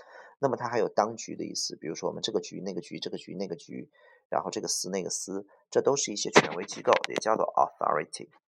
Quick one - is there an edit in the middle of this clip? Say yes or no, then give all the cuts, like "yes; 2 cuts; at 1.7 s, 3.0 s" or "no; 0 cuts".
no; 0 cuts